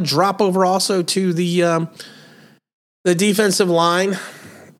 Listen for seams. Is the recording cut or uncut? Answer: uncut